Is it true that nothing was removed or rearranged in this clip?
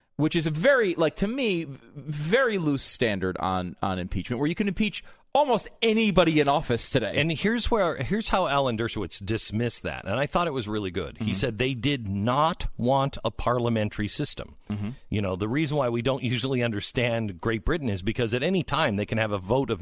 yes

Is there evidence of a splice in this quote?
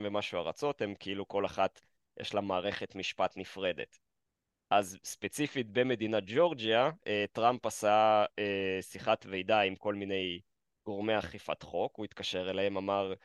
no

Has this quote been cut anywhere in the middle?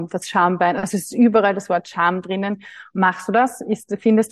yes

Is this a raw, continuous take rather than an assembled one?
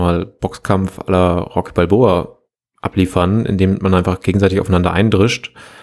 yes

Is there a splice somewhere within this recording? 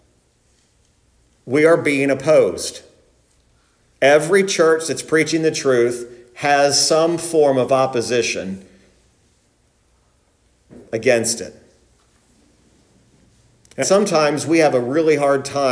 yes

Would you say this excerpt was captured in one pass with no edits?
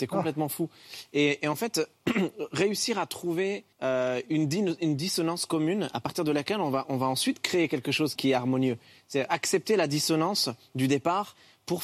no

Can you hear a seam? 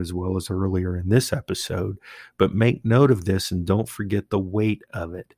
no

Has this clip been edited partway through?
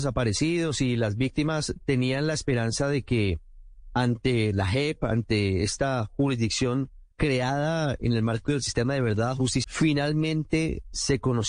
yes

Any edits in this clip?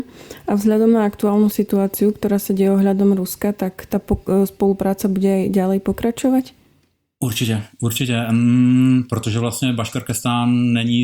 no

